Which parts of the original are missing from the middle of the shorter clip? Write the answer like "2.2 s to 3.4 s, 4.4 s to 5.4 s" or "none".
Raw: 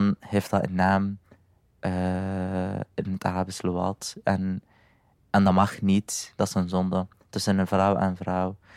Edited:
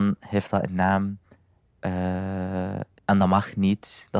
2.9 s to 5.2 s